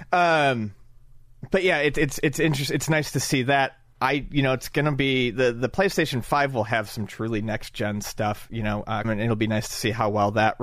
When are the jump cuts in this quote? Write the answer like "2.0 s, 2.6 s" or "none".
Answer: 9.0 s